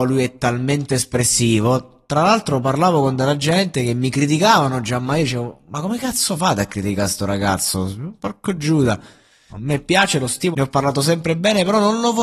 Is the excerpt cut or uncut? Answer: cut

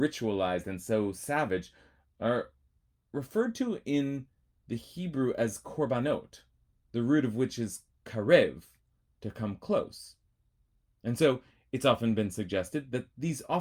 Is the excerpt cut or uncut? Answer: uncut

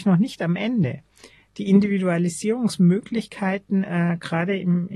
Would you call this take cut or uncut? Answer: uncut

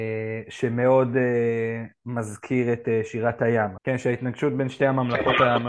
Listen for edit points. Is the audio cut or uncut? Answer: cut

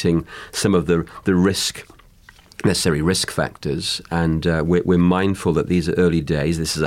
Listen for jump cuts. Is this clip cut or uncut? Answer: uncut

